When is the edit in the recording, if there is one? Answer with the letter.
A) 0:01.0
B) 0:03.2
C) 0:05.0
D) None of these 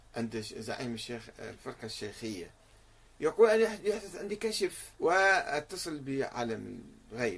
C